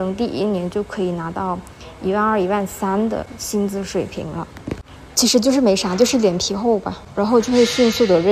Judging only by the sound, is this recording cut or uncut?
cut